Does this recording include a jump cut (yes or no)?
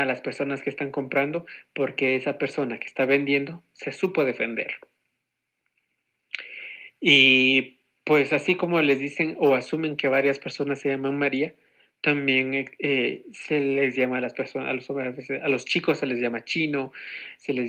no